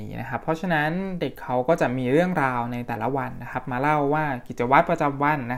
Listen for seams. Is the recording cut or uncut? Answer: cut